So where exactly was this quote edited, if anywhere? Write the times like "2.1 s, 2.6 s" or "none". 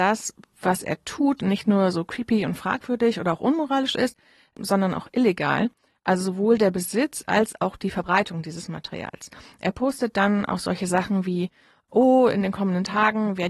none